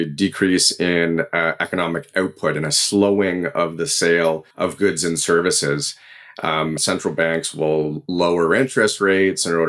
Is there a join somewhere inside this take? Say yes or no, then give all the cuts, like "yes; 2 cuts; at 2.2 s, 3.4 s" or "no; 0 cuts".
yes; 2 cuts; at 4.5 s, 6.8 s